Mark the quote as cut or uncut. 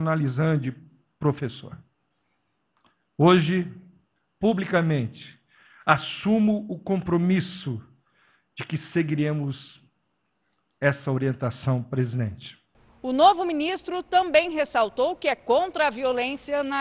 uncut